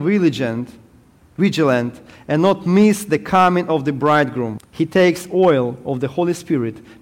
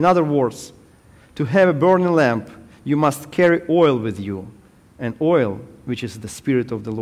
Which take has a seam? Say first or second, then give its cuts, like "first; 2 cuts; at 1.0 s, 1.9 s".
first; 1 cut; at 4.6 s